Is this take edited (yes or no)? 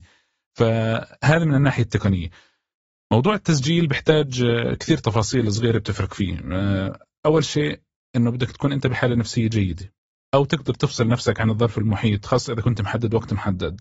no